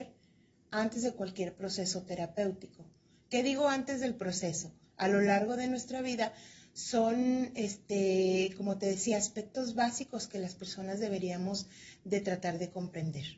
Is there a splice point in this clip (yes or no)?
no